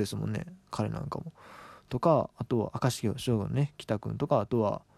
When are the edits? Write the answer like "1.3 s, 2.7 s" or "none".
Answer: none